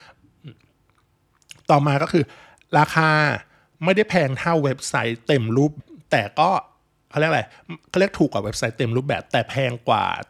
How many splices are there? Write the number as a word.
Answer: one